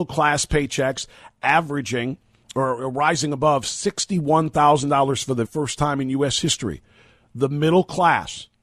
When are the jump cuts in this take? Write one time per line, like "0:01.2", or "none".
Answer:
0:05.4